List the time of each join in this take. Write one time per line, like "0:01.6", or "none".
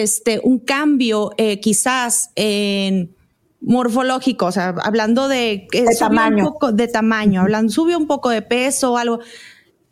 none